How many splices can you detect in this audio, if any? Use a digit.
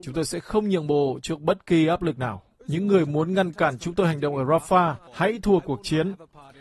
2